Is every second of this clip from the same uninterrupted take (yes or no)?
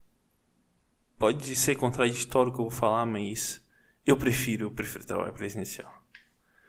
yes